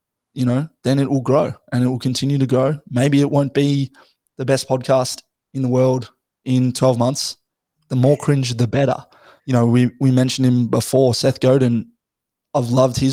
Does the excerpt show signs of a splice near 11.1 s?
no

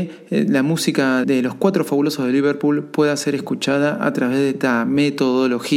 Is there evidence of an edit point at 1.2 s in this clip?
yes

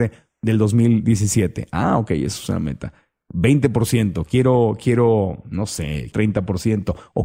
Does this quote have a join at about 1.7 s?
no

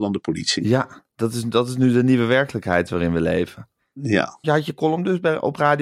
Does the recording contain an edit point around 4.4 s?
yes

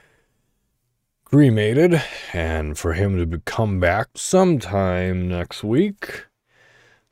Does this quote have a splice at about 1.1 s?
no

